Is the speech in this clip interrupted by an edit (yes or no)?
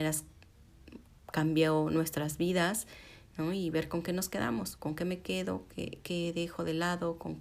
yes